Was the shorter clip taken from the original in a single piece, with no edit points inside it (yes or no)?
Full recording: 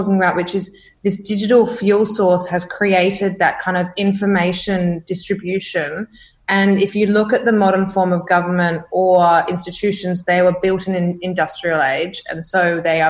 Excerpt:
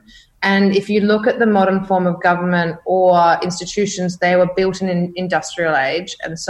yes